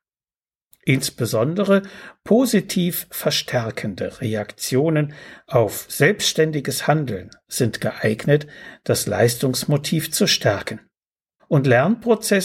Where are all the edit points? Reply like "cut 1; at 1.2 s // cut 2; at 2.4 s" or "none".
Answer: cut 1; at 11.4 s